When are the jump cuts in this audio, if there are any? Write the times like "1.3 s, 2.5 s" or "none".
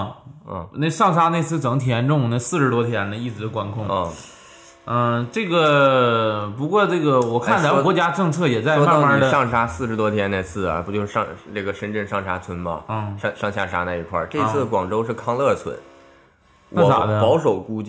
none

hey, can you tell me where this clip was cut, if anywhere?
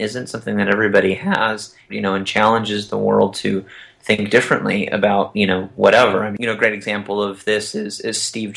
1.9 s

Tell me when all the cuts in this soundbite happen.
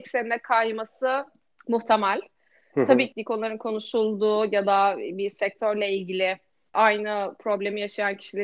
none

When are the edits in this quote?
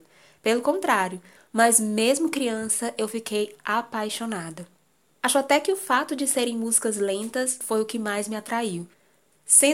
1.4 s

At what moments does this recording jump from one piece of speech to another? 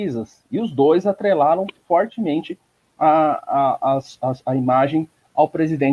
none

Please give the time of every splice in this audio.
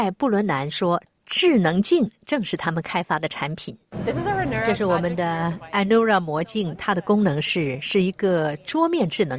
none

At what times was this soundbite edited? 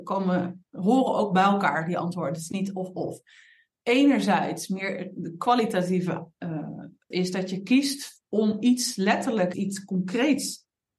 7.1 s, 9.5 s

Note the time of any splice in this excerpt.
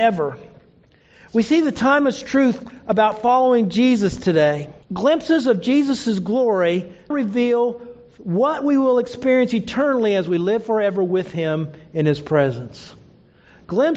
4.8 s, 7.1 s

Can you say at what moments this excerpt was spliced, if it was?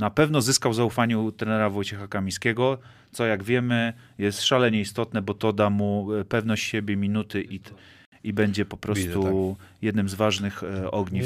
none

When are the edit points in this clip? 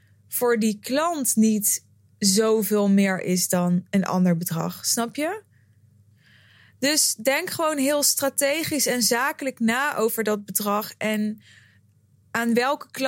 none

